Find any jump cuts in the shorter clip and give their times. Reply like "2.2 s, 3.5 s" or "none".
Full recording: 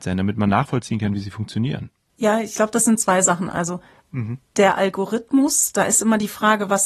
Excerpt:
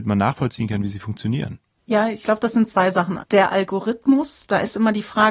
3.2 s